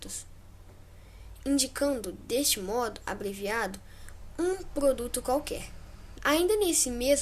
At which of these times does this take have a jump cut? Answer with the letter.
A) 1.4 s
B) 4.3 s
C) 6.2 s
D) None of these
C